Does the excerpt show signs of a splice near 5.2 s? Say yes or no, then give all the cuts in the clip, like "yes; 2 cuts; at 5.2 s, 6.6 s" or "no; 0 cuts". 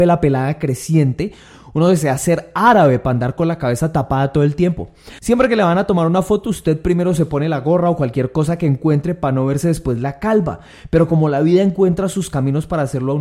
yes; 1 cut; at 5.2 s